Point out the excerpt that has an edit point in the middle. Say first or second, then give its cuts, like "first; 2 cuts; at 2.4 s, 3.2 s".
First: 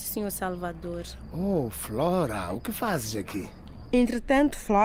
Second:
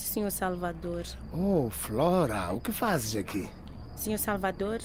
first; 1 cut; at 3.9 s